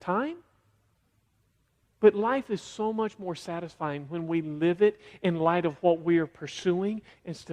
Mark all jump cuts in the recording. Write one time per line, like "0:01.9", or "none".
0:01.8